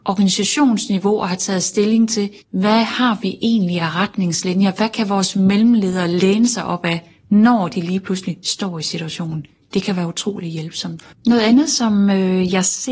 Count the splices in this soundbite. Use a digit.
2